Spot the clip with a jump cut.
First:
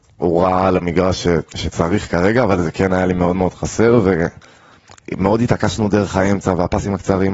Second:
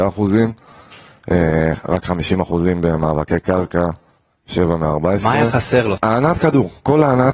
second; 1 cut; at 6.0 s

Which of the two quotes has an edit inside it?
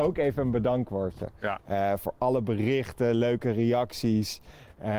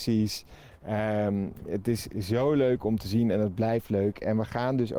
first; 1 cut; at 1.6 s

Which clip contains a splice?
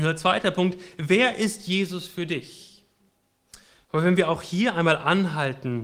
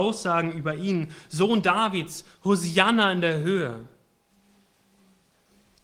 first; 1 cut; at 3.8 s

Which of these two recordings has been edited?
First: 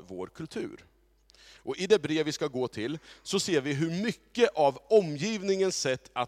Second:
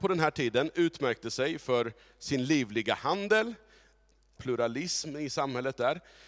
second; 1 cut; at 4.4 s

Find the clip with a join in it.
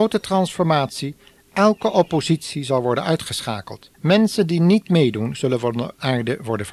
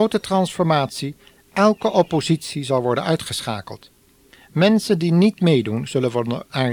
first; 1 cut; at 3.9 s

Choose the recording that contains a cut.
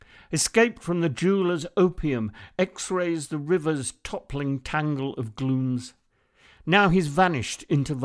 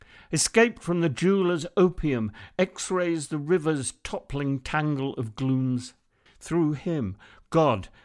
second; 1 cut; at 6.3 s

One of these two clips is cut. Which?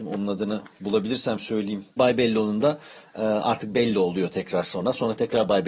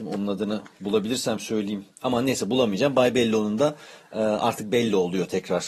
first; 1 cut; at 2.0 s

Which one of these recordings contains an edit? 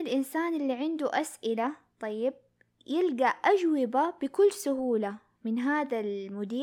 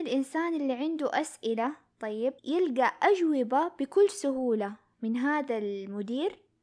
second; 1 cut; at 2.4 s

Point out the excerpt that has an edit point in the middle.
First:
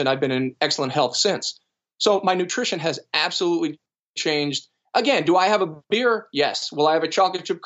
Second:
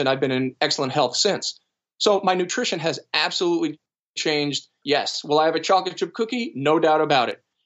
second; 1 cut; at 4.8 s

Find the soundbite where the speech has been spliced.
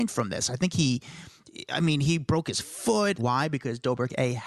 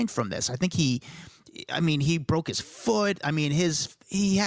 first; 1 cut; at 3.2 s

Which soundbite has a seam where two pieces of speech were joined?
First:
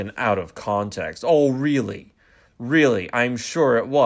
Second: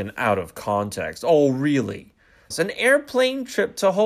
second; 1 cut; at 2.5 s

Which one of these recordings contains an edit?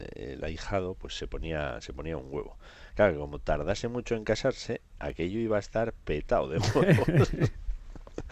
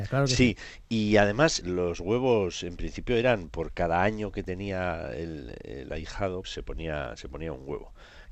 second; 2 cuts; at 1.6 s, 6.4 s

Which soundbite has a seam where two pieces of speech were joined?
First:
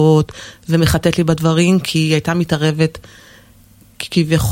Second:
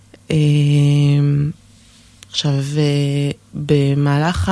second; 1 cut; at 2.3 s

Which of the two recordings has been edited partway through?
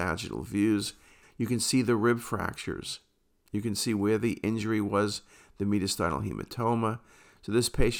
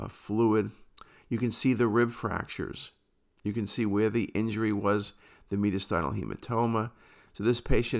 first; 1 cut; at 1.2 s

